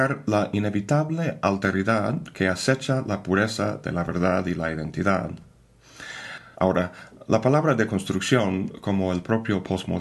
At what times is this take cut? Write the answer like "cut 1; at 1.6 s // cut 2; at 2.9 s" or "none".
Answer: cut 1; at 6.5 s